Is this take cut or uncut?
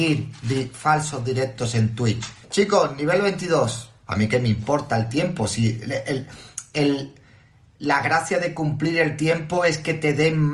cut